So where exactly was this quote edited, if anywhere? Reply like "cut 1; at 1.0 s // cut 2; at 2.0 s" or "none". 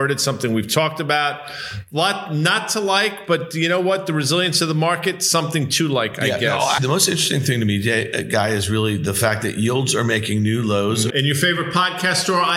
cut 1; at 6.8 s // cut 2; at 11.1 s

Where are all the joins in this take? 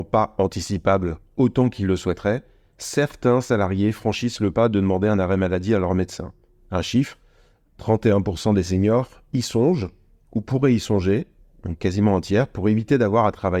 none

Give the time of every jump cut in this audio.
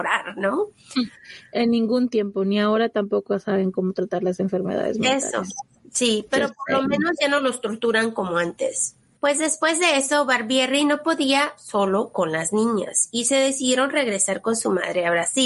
cut 1; at 9.2 s

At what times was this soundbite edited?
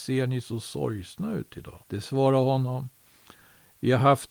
cut 1; at 1.8 s

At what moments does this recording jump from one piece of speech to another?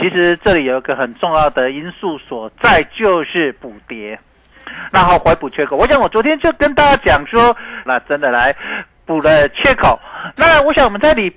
cut 1; at 7.9 s

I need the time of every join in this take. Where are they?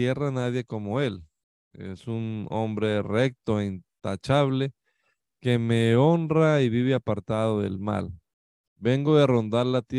cut 1; at 8.7 s

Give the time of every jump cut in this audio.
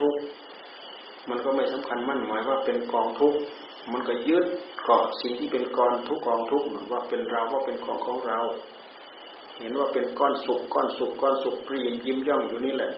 cut 1; at 6.2 s

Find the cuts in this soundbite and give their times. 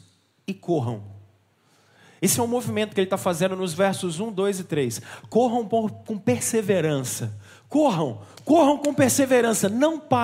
none

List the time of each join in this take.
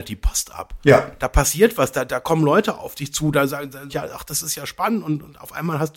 cut 1; at 3.9 s

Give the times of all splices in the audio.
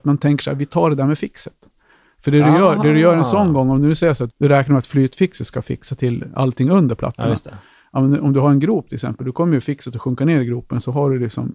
cut 1; at 4.3 s

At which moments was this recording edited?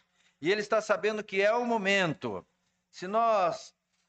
none

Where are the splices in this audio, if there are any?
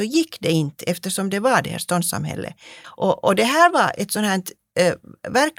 cut 1; at 2.8 s

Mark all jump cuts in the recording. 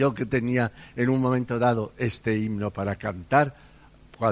none

